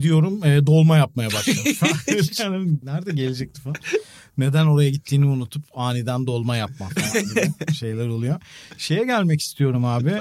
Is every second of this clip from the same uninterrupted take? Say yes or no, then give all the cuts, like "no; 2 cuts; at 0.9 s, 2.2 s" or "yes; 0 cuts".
no; 1 cut; at 2.8 s